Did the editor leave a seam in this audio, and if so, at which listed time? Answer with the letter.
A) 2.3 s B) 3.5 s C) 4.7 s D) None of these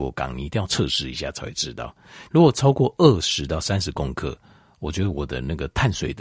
A